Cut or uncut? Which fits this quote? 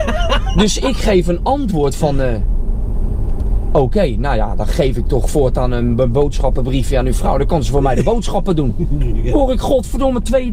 uncut